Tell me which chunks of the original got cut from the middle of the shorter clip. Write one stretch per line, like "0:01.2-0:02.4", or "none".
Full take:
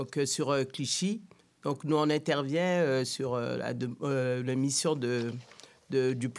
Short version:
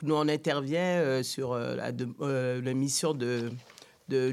none